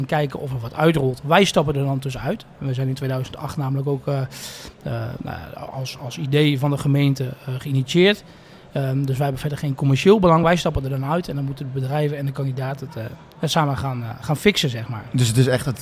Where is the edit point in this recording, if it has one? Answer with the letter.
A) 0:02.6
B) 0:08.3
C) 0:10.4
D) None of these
D